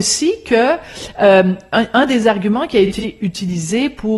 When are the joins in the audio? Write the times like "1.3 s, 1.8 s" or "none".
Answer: none